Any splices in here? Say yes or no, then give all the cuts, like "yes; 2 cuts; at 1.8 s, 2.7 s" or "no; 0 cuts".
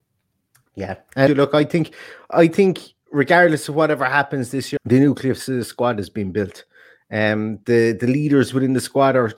yes; 2 cuts; at 1.3 s, 4.8 s